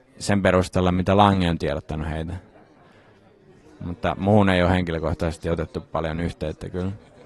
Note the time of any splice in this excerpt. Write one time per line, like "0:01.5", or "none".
none